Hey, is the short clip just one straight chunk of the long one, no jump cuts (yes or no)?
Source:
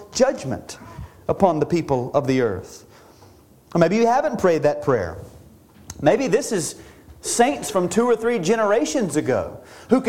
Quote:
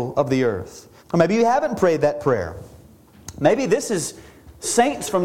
no